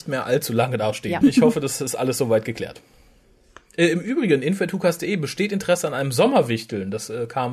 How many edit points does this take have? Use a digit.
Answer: 1